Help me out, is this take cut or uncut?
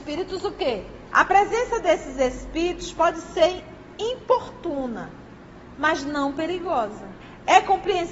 cut